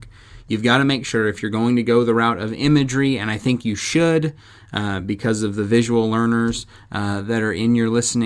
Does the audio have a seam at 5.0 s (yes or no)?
no